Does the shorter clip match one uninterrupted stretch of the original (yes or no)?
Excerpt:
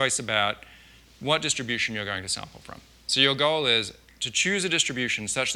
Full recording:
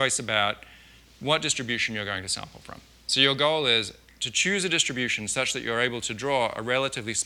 yes